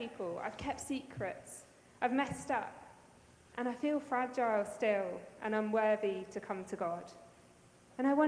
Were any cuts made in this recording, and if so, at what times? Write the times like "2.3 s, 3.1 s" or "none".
none